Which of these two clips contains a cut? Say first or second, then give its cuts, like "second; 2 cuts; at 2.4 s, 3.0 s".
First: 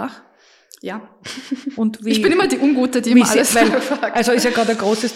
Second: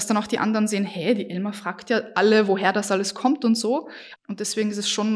second; 1 cut; at 4.2 s